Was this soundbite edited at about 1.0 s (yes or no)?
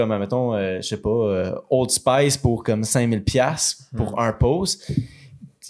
no